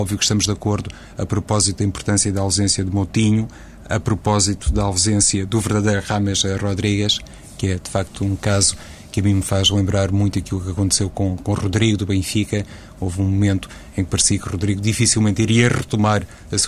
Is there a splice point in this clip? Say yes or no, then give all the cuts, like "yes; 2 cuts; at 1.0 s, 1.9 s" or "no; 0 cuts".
no; 0 cuts